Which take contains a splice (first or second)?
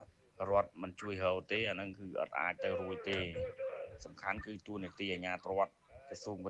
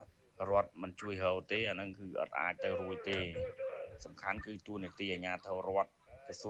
first